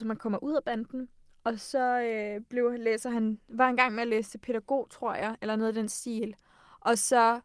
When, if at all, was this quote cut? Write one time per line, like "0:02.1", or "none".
none